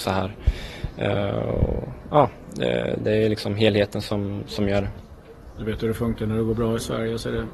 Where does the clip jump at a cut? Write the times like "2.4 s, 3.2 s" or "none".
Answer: none